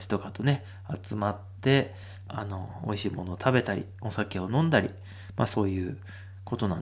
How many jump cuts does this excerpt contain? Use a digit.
1